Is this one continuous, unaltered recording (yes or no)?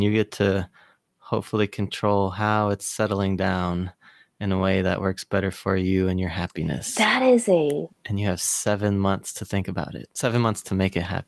yes